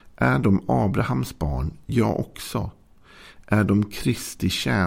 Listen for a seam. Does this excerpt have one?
no; 0 cuts

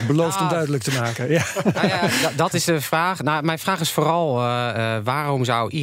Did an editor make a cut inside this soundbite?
no; 0 cuts

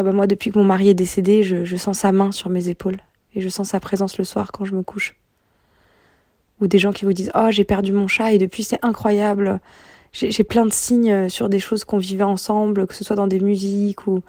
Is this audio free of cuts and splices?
yes; 0 cuts

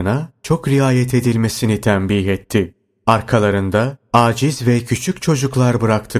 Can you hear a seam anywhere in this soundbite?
no; 0 cuts

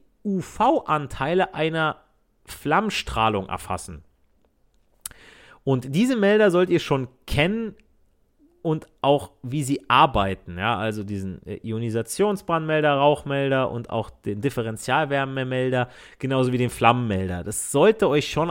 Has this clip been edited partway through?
no; 0 cuts

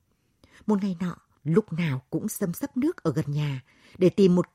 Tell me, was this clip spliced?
yes; 1 cut; at 1.4 s

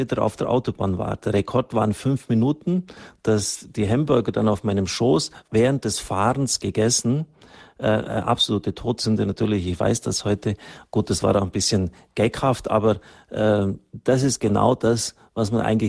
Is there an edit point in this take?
no; 0 cuts

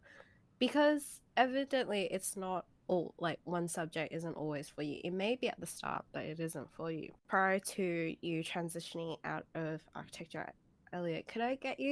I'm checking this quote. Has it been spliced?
no; 0 cuts

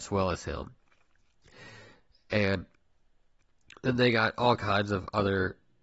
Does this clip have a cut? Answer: no; 0 cuts

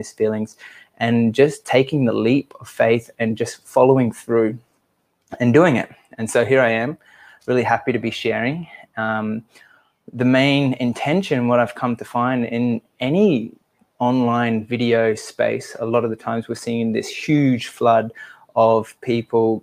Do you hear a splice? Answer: no; 0 cuts

